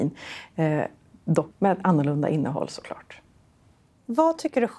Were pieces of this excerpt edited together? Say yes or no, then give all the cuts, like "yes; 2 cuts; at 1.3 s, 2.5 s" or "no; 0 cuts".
yes; 1 cut; at 1.5 s